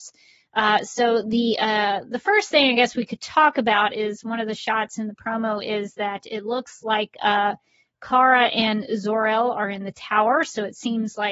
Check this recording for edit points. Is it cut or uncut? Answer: uncut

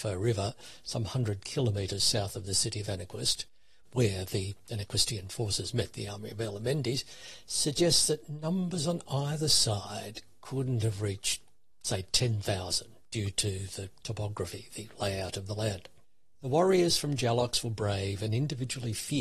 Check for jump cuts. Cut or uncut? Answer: uncut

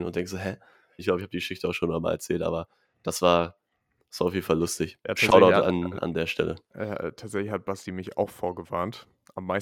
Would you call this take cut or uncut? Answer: cut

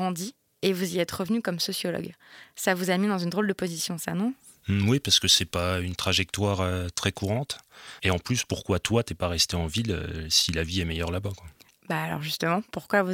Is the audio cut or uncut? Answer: cut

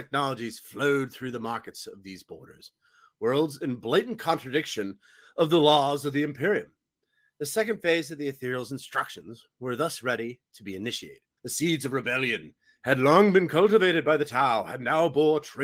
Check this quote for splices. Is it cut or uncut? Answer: cut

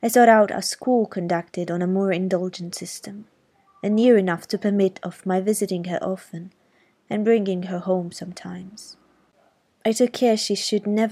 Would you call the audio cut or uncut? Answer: uncut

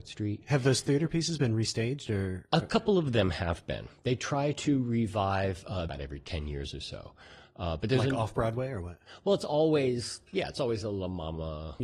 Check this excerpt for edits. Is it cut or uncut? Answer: cut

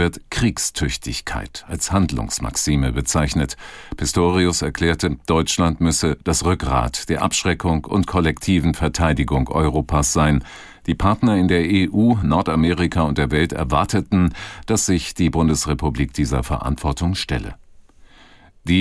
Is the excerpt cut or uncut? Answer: uncut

